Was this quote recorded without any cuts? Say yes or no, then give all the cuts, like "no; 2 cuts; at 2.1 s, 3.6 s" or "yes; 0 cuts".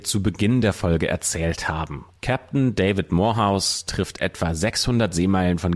no; 1 cut; at 2.2 s